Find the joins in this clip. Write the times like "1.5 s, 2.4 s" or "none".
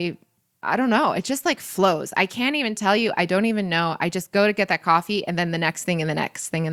none